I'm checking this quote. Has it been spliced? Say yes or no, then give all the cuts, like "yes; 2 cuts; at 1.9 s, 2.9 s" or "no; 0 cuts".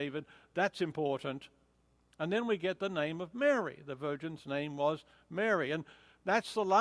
no; 0 cuts